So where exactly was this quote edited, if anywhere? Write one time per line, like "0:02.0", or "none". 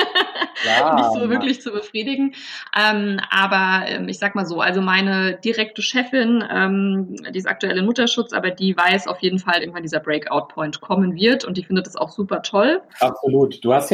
0:09.6
0:12.9

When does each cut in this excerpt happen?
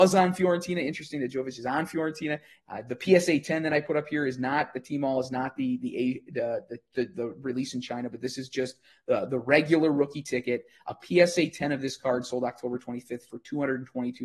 0:02.6

